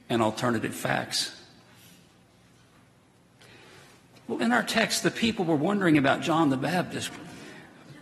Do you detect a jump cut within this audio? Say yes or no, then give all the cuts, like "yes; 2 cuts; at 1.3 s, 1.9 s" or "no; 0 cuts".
yes; 1 cut; at 7.1 s